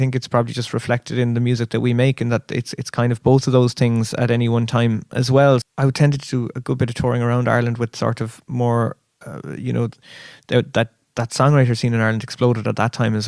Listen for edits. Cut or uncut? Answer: cut